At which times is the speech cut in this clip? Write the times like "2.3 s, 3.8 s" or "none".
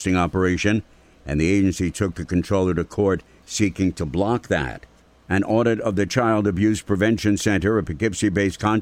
none